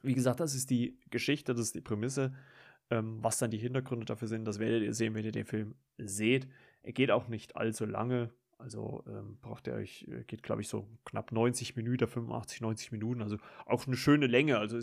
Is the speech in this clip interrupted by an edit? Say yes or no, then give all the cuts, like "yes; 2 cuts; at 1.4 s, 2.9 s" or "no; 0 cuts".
no; 0 cuts